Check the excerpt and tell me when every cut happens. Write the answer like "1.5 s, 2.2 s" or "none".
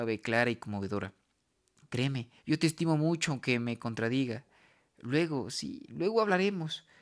2.4 s